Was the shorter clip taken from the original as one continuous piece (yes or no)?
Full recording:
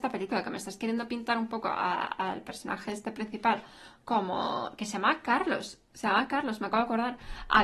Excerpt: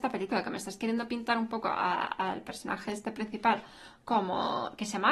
yes